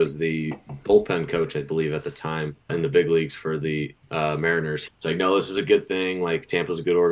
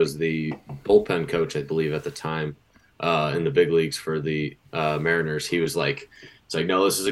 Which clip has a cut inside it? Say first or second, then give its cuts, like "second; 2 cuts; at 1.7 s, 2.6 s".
first; 2 cuts; at 2.7 s, 4.9 s